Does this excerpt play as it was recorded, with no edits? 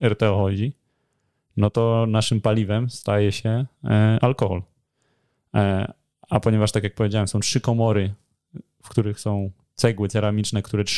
yes; 0 cuts

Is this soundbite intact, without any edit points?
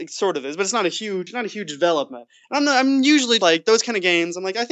no; 1 cut; at 3.4 s

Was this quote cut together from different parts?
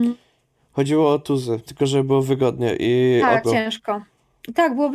yes; 2 cuts; at 1.7 s, 3.4 s

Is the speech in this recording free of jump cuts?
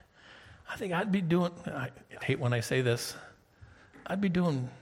no; 1 cut; at 2.2 s

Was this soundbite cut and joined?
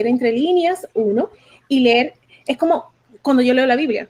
no; 0 cuts

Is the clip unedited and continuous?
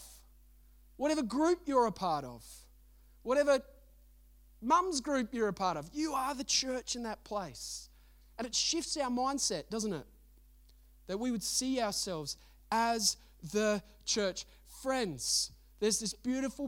yes; 0 cuts

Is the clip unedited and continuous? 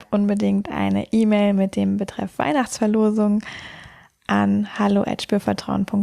yes; 0 cuts

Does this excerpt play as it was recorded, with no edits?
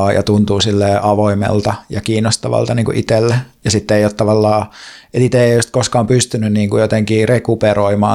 yes; 0 cuts

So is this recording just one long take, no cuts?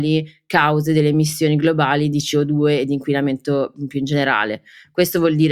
yes; 0 cuts

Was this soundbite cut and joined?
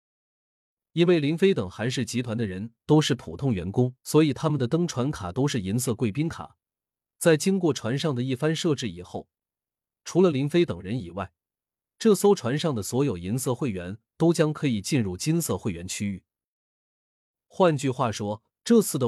yes; 1 cut; at 4.0 s

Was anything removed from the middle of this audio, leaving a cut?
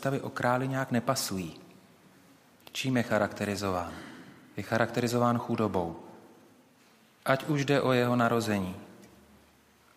yes; 1 cut; at 2.6 s

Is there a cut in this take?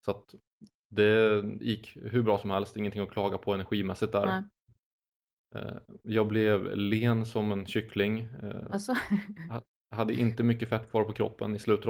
no; 0 cuts

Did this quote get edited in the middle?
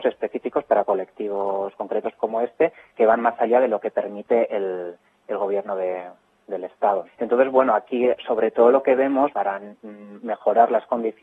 yes; 2 cuts; at 7.0 s, 9.3 s

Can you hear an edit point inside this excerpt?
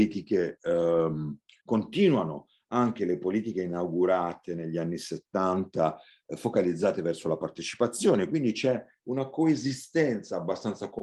yes; 1 cut; at 1.6 s

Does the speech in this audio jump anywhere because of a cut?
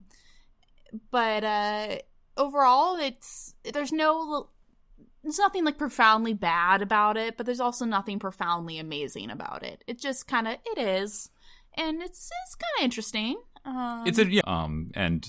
yes; 1 cut; at 14.4 s

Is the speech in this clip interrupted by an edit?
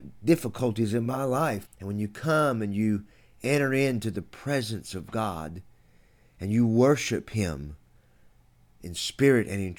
yes; 1 cut; at 1.6 s

